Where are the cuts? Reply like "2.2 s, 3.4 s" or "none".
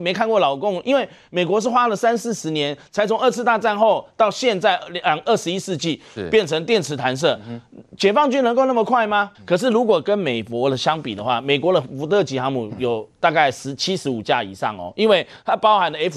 9.3 s